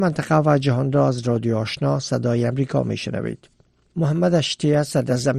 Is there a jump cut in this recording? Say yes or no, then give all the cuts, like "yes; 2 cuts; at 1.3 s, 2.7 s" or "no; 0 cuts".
no; 0 cuts